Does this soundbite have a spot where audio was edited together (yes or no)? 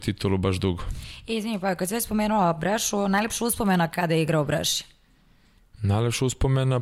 no